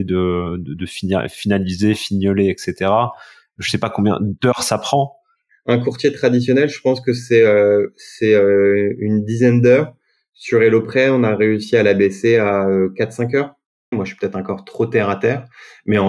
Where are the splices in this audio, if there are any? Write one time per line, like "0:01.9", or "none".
0:13.9